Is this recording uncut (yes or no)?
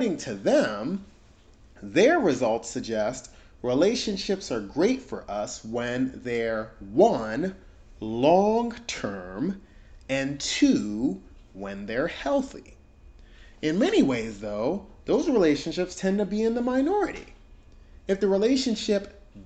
yes